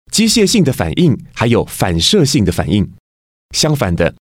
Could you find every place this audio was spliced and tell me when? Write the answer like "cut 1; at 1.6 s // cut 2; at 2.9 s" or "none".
cut 1; at 3.4 s